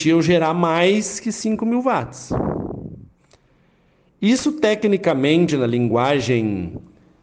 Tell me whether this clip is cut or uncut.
uncut